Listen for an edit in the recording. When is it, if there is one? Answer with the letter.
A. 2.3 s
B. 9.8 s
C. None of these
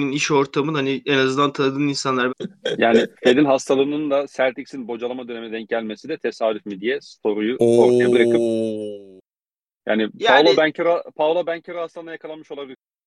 A